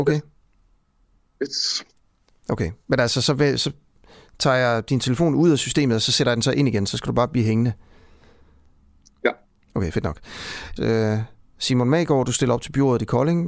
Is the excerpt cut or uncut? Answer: cut